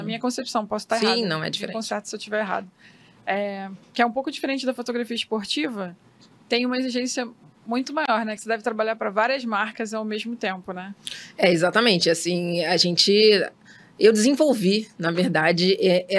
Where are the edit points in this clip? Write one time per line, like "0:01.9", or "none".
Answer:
none